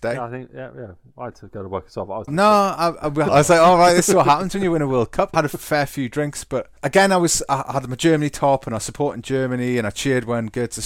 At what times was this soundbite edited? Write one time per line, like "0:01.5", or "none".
0:02.3
0:03.3
0:05.3